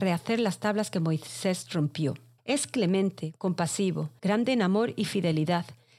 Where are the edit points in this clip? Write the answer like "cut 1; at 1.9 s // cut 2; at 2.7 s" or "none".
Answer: cut 1; at 2.4 s // cut 2; at 4.2 s